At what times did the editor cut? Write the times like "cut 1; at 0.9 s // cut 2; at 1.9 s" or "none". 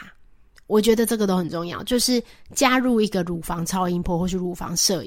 none